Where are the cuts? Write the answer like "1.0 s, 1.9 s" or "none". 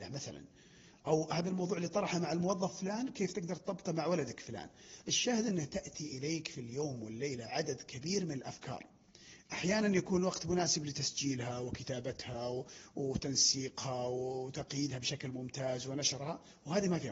none